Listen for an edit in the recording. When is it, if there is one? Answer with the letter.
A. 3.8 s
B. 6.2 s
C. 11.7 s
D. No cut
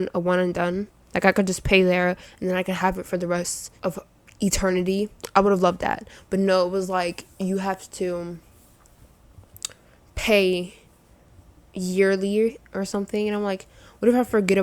A